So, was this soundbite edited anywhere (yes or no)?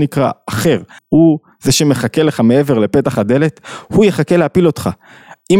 yes